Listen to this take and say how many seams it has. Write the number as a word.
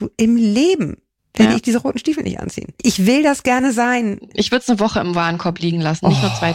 zero